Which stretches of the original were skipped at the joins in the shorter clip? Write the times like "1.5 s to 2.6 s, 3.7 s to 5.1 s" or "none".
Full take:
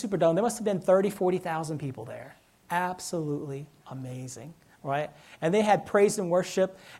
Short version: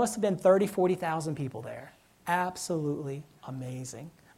none